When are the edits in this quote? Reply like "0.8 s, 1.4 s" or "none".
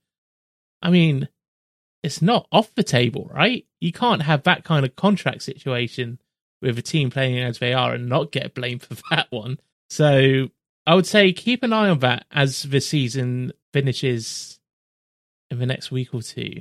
9.7 s, 13.6 s